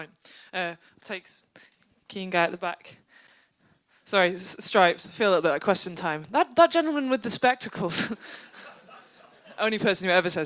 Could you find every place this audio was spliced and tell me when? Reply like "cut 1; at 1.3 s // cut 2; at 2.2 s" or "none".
none